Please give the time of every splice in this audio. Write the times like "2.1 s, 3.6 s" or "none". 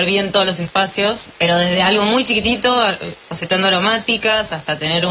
1.4 s